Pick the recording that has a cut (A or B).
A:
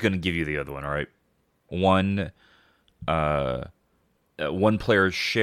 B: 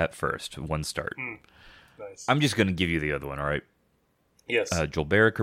A